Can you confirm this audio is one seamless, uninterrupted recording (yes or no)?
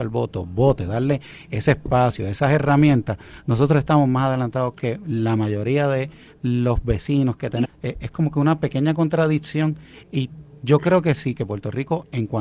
no